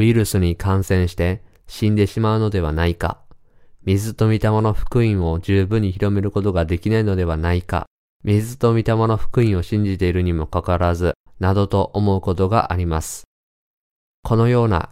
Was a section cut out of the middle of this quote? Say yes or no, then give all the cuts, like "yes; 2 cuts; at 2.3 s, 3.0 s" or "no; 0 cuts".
yes; 1 cut; at 11.3 s